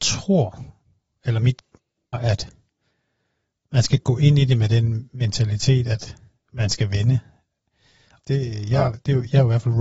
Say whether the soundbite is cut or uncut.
cut